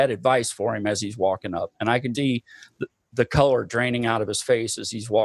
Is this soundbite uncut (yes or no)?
no